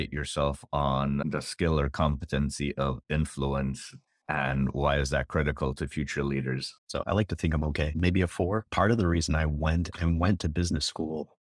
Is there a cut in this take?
yes; 1 cut; at 6.8 s

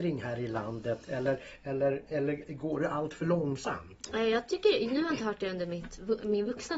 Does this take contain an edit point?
no; 0 cuts

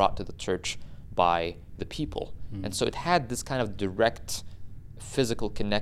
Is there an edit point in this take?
no; 0 cuts

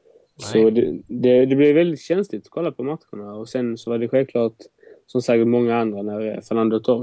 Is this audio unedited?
yes; 0 cuts

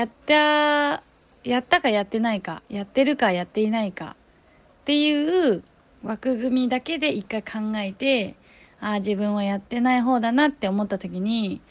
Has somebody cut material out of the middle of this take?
no; 0 cuts

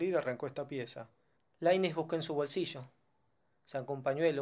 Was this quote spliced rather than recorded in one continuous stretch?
yes; 1 cut; at 1.4 s

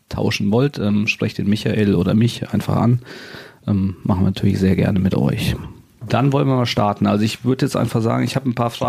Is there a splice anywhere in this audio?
yes; 1 cut; at 6.0 s

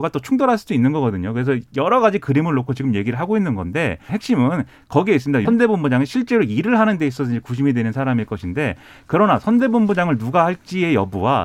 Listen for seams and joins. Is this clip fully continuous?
no; 2 cuts; at 4.1 s, 5.5 s

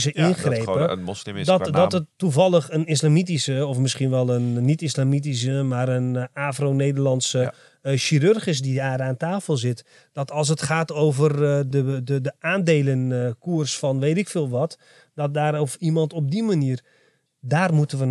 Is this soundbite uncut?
no; 1 cut; at 11.7 s

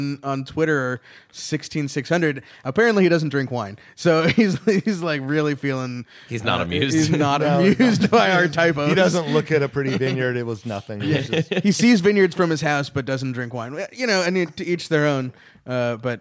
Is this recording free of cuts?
yes; 0 cuts

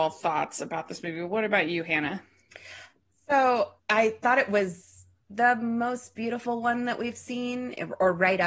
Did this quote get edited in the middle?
yes; 2 cuts; at 3.8 s, 5.3 s

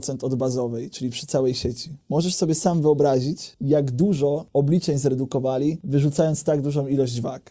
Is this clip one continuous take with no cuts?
yes; 0 cuts

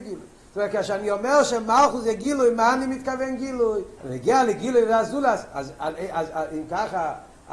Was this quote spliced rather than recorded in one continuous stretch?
yes; 1 cut; at 4.0 s

